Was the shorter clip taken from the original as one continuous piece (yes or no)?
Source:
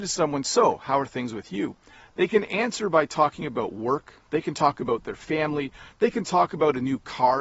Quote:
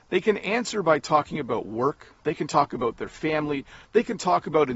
yes